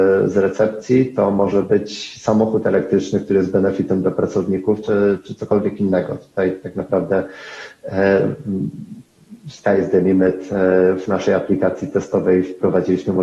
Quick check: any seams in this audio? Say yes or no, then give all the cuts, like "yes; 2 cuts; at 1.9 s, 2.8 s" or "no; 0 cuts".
no; 0 cuts